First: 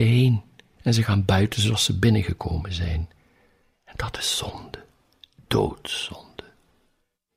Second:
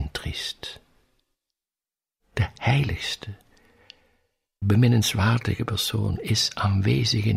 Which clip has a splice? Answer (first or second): second